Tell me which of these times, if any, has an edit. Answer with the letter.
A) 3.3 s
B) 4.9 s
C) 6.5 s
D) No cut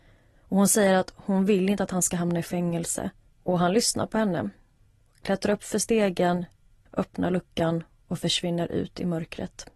A